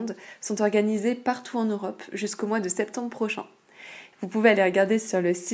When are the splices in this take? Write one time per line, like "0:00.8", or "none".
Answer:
0:04.1